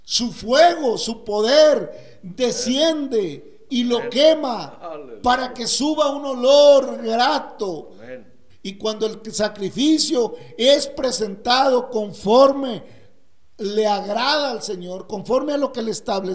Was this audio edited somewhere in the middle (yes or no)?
yes